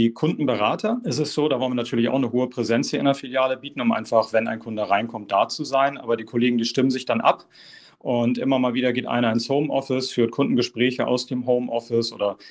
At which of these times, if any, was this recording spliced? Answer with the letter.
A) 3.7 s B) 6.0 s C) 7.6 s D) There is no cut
D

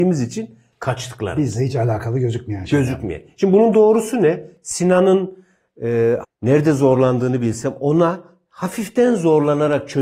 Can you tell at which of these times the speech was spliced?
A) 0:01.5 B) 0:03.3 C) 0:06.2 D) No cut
C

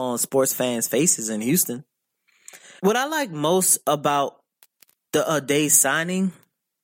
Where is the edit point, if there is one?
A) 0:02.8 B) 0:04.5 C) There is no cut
A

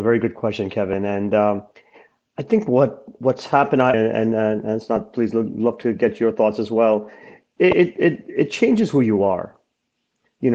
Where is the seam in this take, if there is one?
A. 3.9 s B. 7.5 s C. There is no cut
A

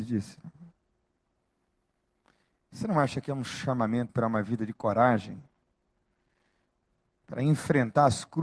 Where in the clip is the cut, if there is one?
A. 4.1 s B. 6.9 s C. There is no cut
A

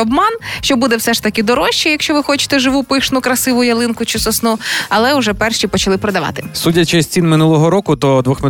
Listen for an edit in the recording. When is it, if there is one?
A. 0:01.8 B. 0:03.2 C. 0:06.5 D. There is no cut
D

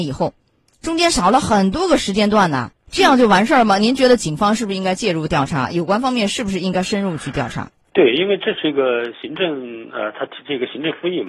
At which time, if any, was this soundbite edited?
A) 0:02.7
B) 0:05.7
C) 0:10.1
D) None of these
A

